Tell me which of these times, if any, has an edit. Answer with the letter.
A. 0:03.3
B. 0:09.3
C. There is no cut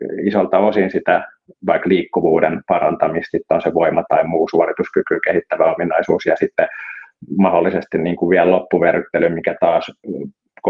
A